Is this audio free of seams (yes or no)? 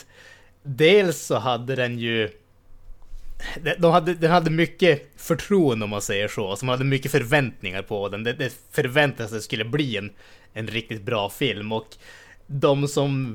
yes